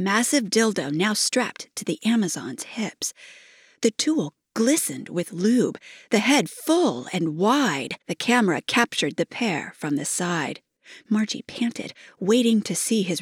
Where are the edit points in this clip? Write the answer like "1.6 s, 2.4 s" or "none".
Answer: 8.0 s